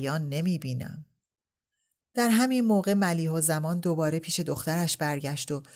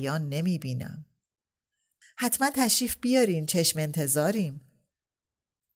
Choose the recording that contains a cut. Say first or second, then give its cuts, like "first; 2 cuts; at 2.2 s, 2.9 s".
second; 1 cut; at 2.0 s